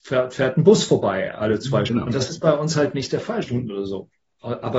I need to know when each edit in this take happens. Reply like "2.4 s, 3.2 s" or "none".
1.9 s, 3.4 s